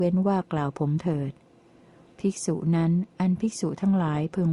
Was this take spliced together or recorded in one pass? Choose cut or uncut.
uncut